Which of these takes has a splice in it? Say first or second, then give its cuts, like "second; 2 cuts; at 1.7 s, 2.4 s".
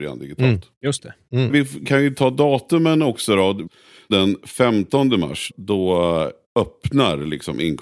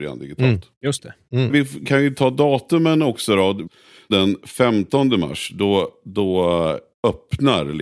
first; 1 cut; at 5.5 s